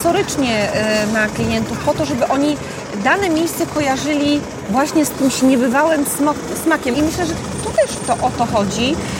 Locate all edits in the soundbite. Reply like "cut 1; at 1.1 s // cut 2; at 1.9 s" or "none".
cut 1; at 6.9 s